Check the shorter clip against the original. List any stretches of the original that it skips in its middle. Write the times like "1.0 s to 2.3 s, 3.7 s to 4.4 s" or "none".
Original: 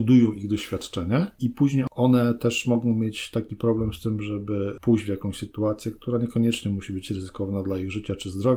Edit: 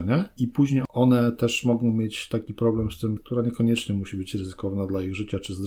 4.2 s to 5.9 s